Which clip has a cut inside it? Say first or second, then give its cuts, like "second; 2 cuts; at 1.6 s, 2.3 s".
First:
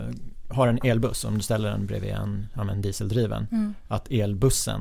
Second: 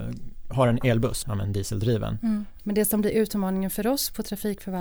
second; 2 cuts; at 1.2 s, 2.6 s